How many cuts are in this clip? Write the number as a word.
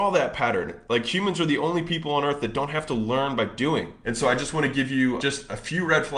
two